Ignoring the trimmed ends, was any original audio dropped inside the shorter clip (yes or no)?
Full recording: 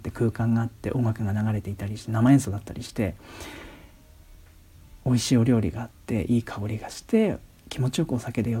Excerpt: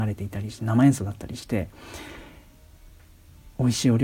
no